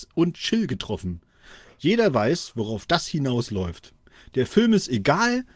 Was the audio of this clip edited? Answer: no; 0 cuts

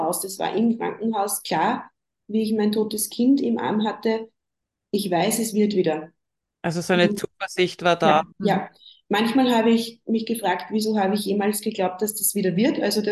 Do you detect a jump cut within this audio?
yes; 1 cut; at 8.3 s

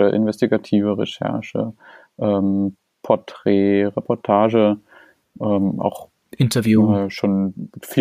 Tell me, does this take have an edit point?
no; 0 cuts

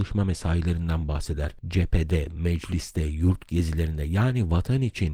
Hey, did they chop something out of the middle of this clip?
no; 0 cuts

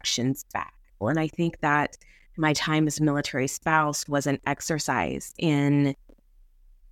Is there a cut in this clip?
yes; 1 cut; at 1.0 s

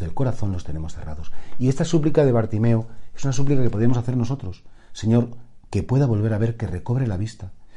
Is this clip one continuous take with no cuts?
yes; 0 cuts

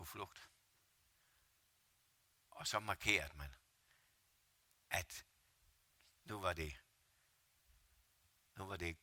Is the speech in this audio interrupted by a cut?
no; 0 cuts

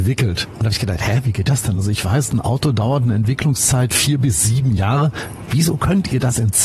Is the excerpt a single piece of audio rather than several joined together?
yes; 0 cuts

